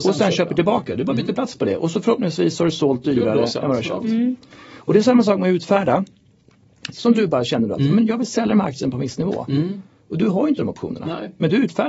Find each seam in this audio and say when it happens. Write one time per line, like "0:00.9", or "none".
0:06.9